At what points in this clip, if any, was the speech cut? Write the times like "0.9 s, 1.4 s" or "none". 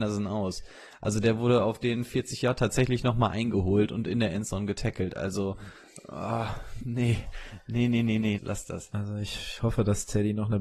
8.4 s

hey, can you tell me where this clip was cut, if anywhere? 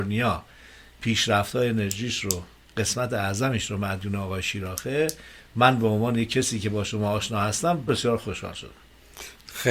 7.9 s

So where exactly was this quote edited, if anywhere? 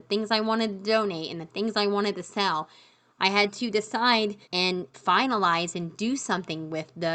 3.1 s, 4.4 s

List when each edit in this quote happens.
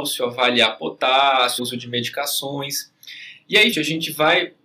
1.6 s, 3.7 s

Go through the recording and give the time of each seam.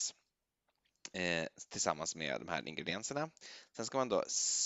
none

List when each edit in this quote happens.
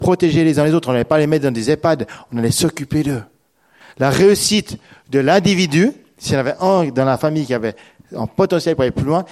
3.8 s

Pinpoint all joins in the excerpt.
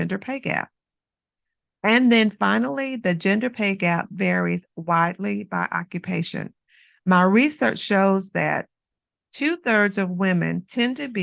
none

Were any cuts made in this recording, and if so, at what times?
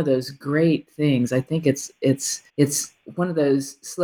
2.5 s

